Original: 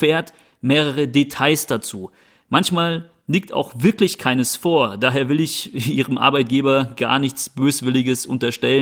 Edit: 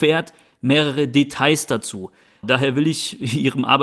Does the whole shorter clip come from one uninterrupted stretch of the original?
no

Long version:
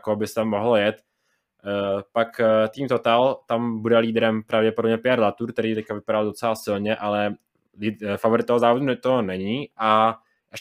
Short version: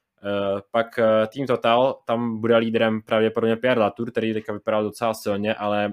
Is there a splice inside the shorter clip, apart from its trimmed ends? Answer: no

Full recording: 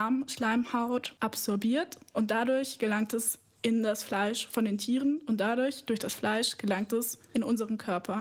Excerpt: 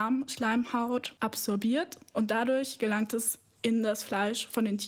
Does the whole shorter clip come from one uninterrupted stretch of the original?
yes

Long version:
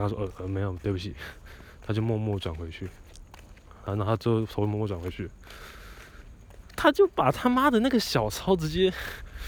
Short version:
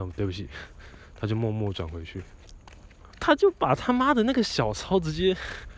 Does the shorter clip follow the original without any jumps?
no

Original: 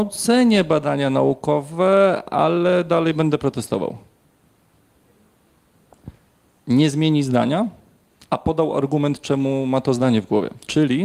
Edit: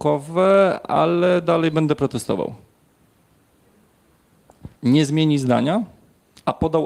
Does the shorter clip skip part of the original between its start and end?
yes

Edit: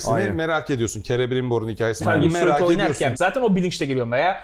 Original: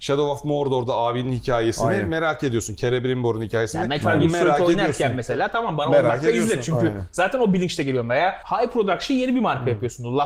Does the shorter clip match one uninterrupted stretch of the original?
no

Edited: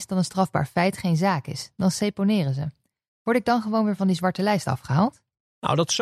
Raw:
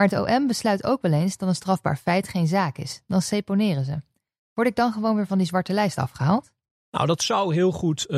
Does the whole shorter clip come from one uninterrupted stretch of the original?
yes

